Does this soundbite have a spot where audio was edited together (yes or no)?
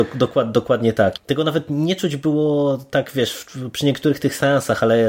yes